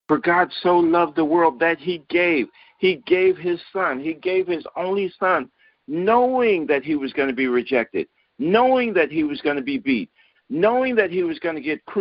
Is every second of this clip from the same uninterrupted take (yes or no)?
no